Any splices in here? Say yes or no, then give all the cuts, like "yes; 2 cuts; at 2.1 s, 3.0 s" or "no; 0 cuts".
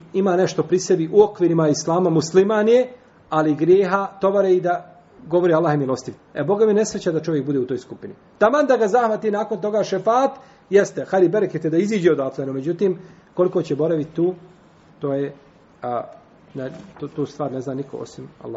yes; 2 cuts; at 6.2 s, 17.1 s